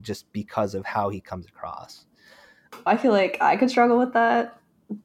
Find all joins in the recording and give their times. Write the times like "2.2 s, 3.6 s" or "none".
2.9 s